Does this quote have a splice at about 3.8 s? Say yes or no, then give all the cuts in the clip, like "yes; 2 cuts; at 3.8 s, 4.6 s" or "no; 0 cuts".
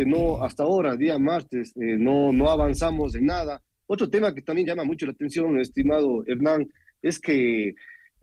yes; 1 cut; at 3.8 s